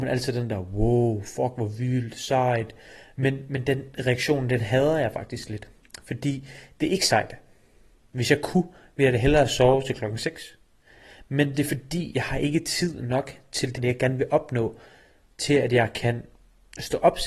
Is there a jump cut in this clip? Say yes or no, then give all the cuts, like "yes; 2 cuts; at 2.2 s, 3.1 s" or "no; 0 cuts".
yes; 1 cut; at 13.7 s